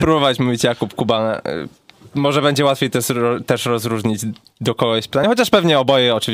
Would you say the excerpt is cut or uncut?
uncut